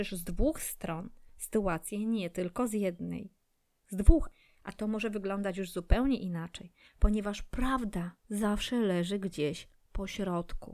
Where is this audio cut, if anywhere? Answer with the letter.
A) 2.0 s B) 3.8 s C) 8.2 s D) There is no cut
C